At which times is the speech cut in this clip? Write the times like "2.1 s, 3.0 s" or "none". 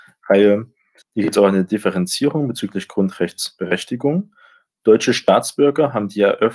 1.0 s